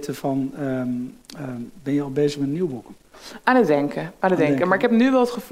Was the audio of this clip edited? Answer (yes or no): no